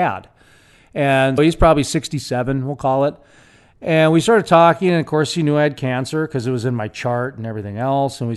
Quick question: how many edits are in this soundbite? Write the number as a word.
one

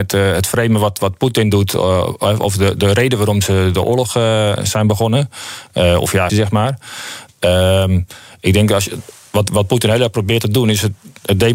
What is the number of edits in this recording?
one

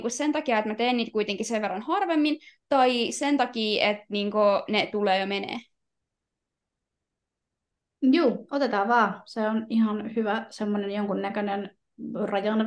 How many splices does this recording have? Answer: zero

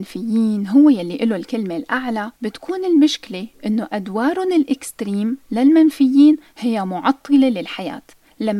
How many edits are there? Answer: one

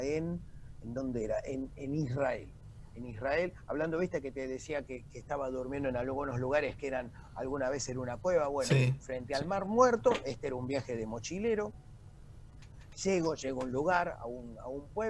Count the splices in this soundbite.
zero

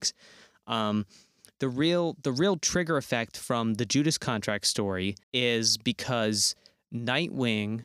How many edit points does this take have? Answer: one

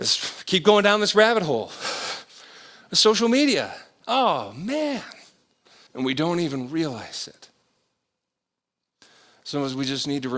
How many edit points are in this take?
one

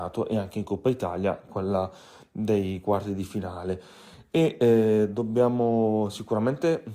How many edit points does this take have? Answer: one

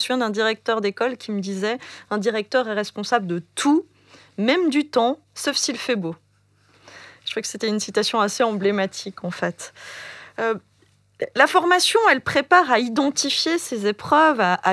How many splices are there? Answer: one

